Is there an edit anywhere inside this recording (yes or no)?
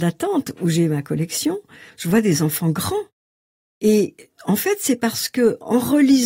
no